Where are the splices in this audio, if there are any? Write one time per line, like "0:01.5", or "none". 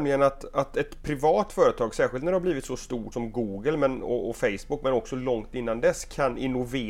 0:03.1